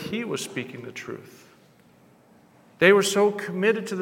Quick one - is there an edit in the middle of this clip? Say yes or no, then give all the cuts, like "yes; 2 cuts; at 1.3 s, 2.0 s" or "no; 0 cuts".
no; 0 cuts